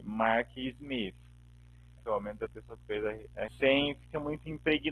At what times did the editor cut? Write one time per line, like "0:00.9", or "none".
0:02.0
0:03.5